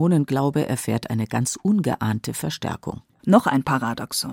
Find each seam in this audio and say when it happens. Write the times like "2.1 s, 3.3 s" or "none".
3.2 s

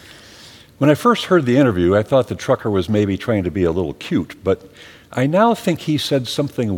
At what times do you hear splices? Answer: none

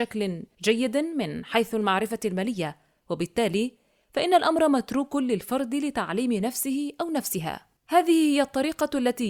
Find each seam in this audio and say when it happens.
7.8 s

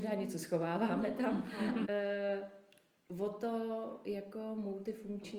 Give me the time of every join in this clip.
1.8 s

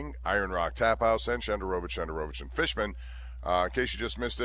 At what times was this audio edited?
none

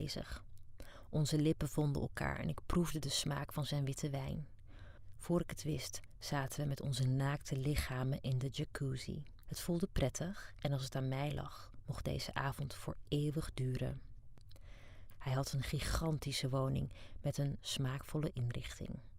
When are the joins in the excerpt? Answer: 15.1 s, 17.6 s

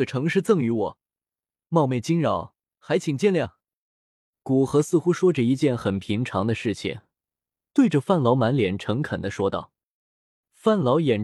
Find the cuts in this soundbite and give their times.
none

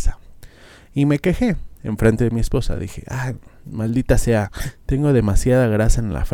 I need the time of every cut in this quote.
none

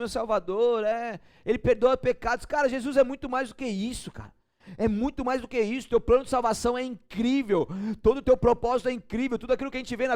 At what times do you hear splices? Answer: none

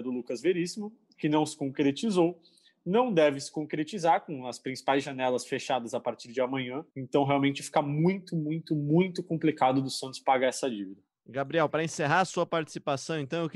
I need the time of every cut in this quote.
6.9 s

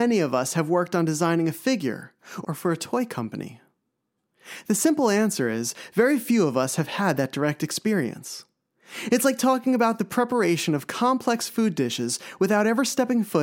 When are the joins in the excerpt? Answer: 2.4 s

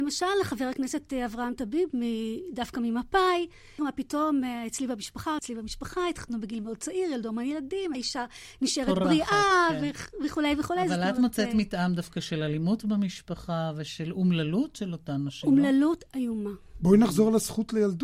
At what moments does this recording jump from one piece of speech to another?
3.8 s, 5.4 s, 7.9 s

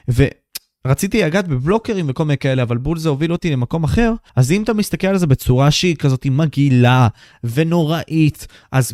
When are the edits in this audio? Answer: 4.3 s

